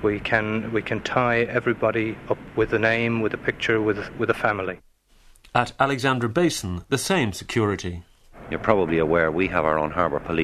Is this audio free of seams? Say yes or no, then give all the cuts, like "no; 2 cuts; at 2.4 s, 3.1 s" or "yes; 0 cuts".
yes; 0 cuts